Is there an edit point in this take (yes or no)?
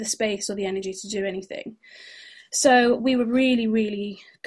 no